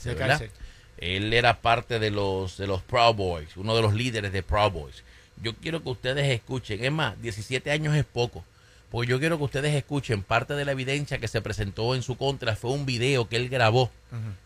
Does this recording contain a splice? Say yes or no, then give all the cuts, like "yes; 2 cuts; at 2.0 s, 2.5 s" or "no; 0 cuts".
no; 0 cuts